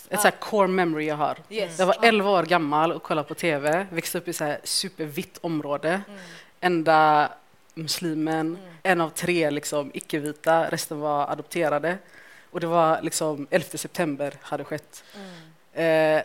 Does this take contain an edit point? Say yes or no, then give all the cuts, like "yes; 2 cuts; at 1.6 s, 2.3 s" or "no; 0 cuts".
yes; 1 cut; at 8.8 s